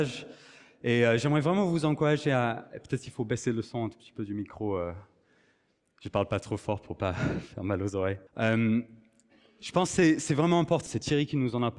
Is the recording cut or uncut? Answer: cut